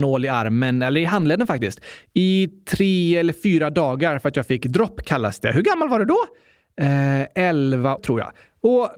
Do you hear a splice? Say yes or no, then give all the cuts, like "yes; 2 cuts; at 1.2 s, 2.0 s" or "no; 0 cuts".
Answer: yes; 1 cut; at 8.0 s